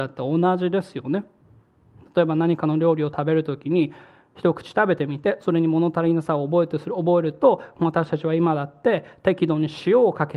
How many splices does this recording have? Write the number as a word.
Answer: zero